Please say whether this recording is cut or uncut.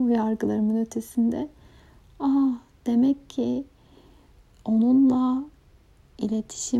uncut